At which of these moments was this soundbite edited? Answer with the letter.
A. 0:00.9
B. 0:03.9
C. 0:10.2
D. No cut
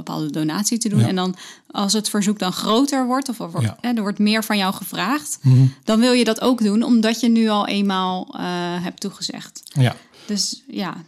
D